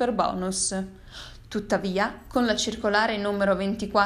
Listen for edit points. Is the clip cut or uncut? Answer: uncut